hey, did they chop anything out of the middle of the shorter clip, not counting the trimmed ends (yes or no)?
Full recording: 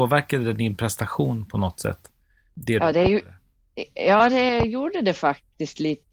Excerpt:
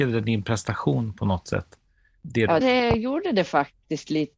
yes